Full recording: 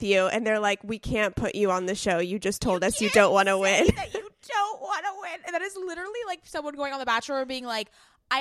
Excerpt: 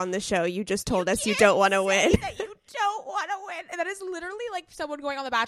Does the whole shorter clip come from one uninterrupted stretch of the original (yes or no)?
yes